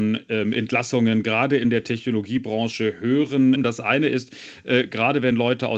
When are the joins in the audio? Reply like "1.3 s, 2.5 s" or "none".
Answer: 3.6 s